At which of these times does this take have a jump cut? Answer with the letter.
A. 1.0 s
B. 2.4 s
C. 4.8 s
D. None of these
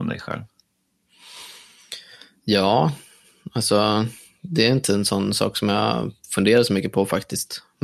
D